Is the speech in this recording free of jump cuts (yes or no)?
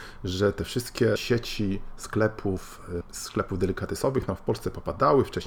no